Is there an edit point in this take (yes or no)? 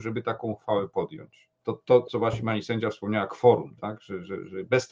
yes